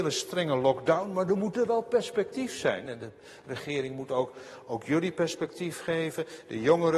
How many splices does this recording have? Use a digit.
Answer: 1